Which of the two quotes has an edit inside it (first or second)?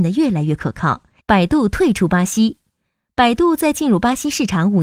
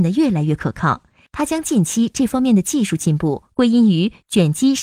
first